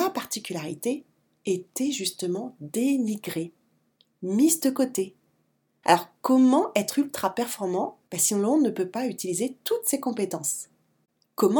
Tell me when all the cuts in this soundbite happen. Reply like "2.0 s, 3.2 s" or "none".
5.8 s, 8.1 s